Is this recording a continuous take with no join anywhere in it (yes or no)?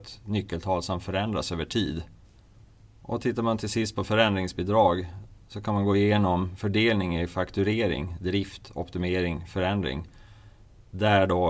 yes